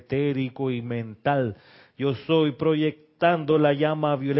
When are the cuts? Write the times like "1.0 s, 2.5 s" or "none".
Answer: none